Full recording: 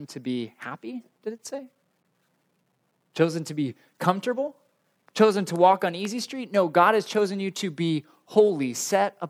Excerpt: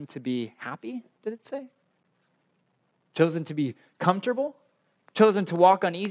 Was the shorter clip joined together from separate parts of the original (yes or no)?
no